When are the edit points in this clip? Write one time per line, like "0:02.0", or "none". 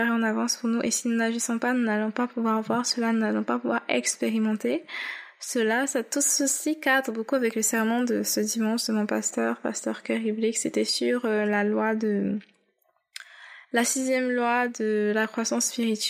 none